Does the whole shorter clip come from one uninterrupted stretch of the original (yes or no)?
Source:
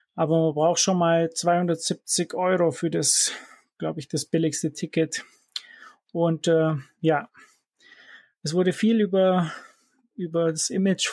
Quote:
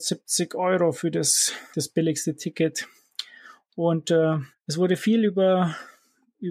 no